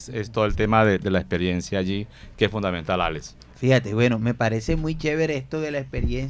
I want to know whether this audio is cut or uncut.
uncut